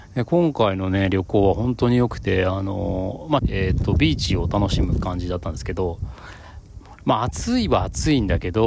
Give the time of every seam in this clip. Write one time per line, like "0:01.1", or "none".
0:03.4